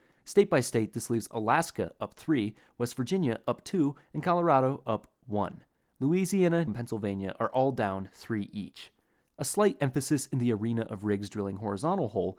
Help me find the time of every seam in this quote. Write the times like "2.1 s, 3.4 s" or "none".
6.7 s